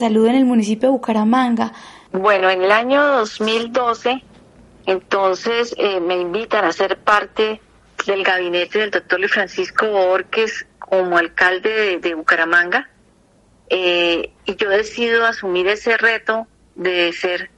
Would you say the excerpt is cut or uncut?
uncut